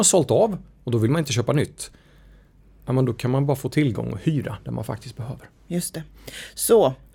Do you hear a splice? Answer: no; 0 cuts

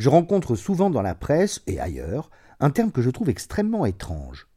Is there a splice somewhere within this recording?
no; 0 cuts

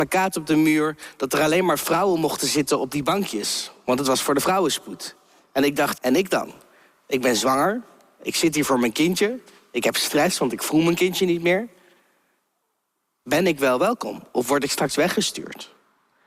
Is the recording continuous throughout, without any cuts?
no; 1 cut; at 5.9 s

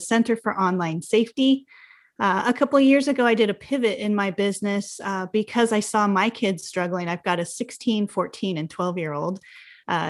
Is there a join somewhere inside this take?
no; 0 cuts

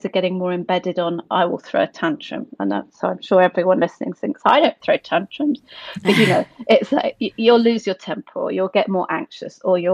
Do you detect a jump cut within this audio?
no; 0 cuts

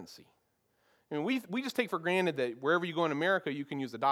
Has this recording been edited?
no; 0 cuts

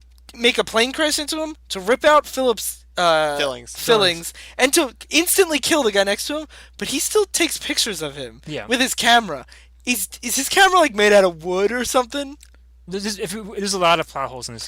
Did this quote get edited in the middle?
no; 0 cuts

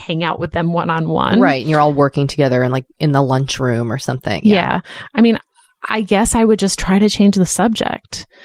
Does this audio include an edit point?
no; 0 cuts

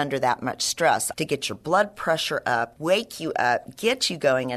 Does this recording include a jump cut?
yes; 2 cuts; at 1.1 s, 2.8 s

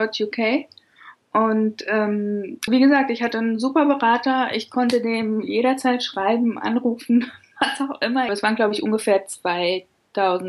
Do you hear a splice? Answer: yes; 2 cuts; at 2.7 s, 8.3 s

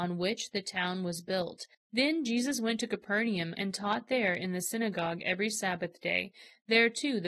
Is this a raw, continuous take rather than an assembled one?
no; 2 cuts; at 1.7 s, 3.5 s

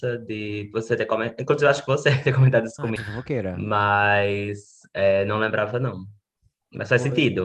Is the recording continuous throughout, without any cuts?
no; 1 cut; at 3.0 s

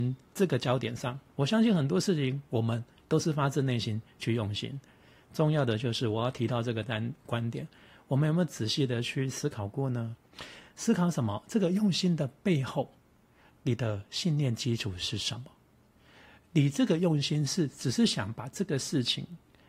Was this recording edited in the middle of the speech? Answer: no; 0 cuts

